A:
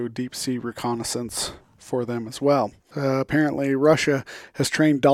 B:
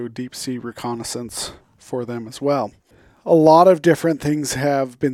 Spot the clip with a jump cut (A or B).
A